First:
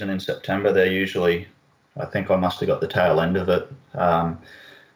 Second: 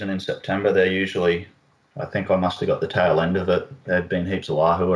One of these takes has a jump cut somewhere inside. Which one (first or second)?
second